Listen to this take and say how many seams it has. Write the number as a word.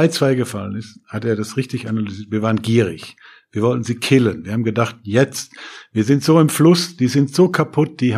zero